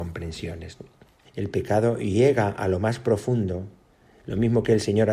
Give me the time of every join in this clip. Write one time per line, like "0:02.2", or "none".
0:01.2